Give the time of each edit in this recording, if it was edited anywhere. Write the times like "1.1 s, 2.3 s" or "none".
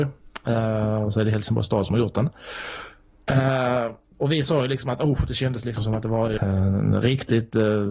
6.4 s